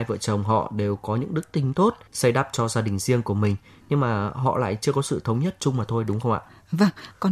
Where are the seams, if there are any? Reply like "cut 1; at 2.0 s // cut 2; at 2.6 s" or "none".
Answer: cut 1; at 2.1 s

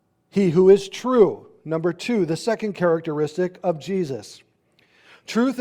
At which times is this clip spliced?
none

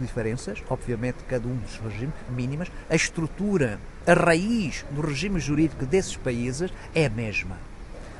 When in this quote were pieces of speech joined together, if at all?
cut 1; at 2.3 s

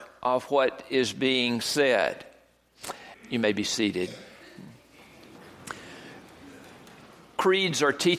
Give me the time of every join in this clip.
cut 1; at 3.1 s

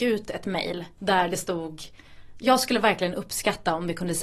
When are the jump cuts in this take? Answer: cut 1; at 1.0 s

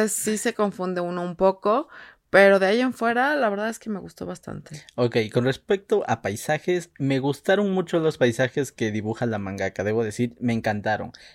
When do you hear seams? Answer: none

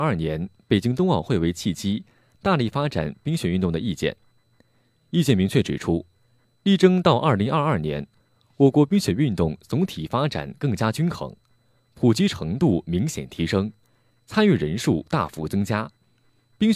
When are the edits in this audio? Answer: none

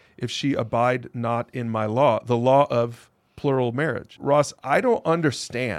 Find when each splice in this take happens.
cut 1; at 4.2 s

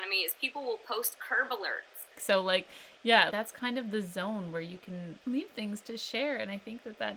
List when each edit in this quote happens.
cut 1; at 2.2 s // cut 2; at 3.3 s

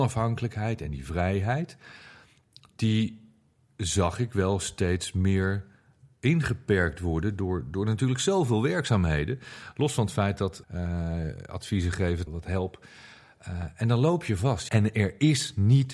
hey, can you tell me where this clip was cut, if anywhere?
cut 1; at 10.6 s // cut 2; at 12.3 s // cut 3; at 14.7 s

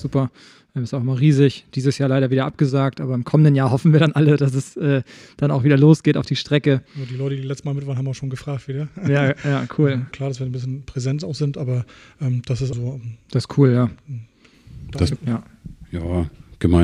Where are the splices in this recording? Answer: cut 1; at 10.1 s // cut 2; at 12.7 s // cut 3; at 15.2 s

